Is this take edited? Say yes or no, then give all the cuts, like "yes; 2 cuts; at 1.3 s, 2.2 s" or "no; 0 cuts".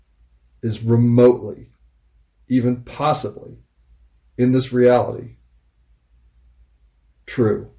no; 0 cuts